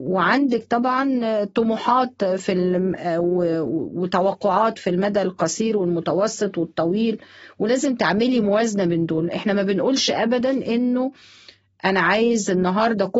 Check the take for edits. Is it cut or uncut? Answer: uncut